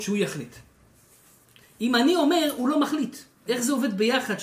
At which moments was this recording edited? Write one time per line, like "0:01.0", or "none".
0:03.5